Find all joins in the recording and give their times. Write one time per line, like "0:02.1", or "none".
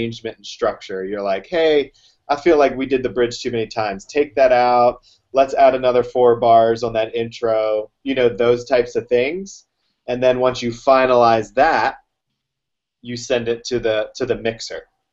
none